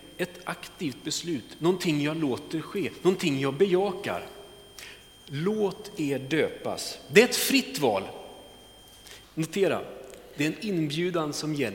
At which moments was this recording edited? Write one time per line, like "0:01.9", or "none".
0:09.2